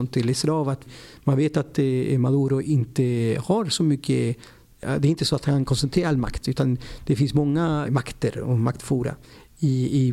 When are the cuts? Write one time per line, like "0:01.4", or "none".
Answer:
0:07.8